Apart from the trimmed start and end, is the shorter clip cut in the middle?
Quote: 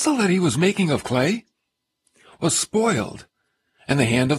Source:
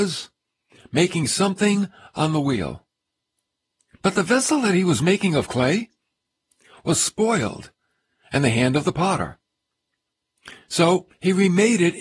no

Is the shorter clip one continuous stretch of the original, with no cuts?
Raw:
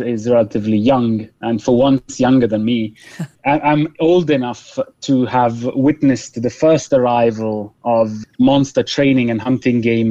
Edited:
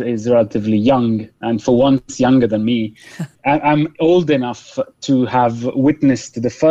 yes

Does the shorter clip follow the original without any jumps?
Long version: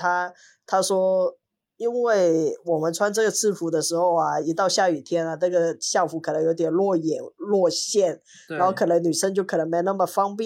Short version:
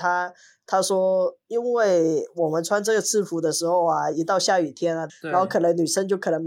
no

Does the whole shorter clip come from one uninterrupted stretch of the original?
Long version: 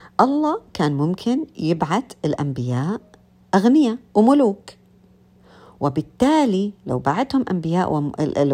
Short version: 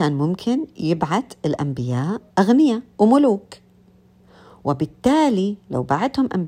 no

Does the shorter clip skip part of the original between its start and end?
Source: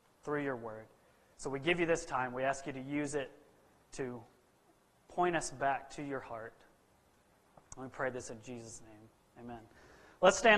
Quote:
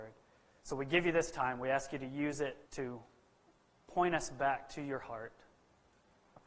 yes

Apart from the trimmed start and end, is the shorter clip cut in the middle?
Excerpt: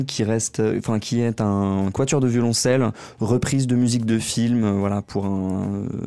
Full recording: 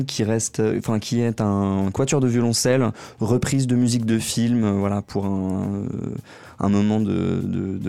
no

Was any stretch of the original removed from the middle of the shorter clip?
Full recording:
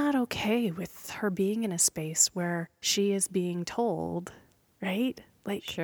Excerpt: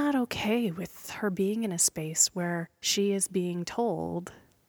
no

